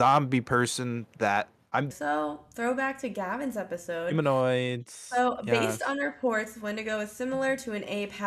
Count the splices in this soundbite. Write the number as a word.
one